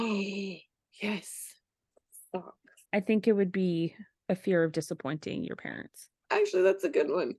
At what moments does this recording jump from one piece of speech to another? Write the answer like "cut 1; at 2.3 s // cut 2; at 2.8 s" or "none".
cut 1; at 2.8 s // cut 2; at 6.2 s